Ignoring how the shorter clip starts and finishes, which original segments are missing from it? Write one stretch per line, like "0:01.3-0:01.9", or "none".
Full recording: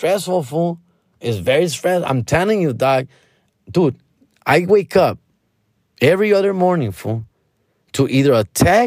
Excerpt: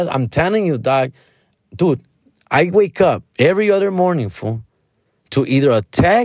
0:05.2-0:05.9